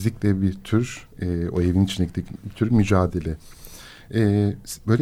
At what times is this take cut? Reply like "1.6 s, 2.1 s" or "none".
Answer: none